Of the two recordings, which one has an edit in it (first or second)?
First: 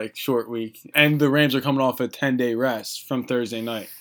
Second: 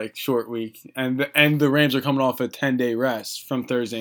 first